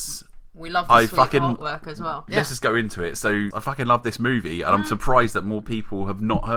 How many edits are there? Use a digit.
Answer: 2